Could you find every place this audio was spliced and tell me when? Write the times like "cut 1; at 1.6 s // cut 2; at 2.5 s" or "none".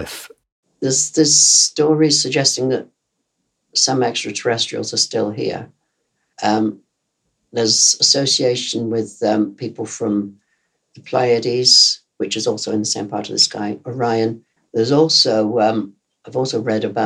cut 1; at 6.3 s // cut 2; at 14.6 s